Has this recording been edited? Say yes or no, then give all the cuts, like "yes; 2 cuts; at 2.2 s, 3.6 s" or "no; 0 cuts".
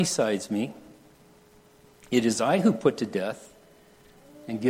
no; 0 cuts